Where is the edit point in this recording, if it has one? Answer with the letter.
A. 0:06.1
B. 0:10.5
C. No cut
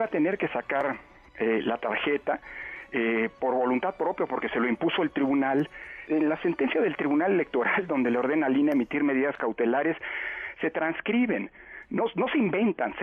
A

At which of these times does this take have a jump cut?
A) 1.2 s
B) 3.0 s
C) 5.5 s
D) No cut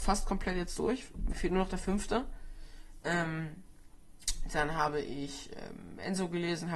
D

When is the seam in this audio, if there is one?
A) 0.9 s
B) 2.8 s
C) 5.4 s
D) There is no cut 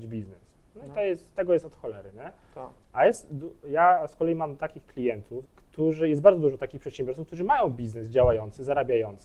C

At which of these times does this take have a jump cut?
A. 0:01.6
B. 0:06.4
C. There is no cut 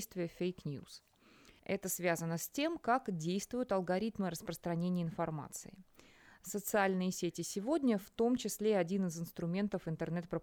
A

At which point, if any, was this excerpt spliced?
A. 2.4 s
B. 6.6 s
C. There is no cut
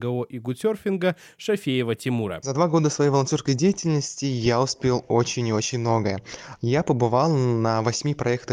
B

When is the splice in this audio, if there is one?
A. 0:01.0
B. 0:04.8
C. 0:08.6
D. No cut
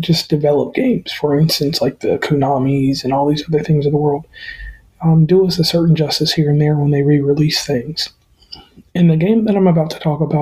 D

